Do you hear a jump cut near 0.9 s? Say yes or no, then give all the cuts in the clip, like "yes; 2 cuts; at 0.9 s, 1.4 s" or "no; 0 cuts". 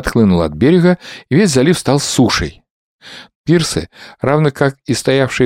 no; 1 cut; at 3.3 s